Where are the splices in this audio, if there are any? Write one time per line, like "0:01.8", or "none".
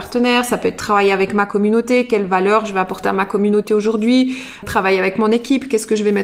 0:04.6